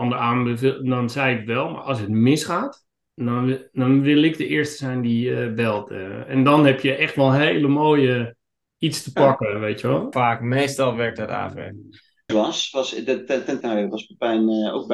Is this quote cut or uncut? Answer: cut